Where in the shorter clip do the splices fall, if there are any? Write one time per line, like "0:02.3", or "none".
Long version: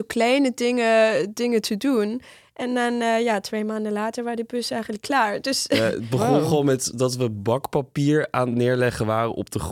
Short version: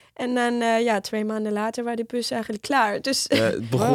none